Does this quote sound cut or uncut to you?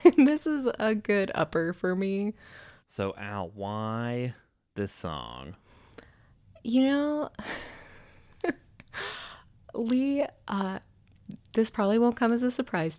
cut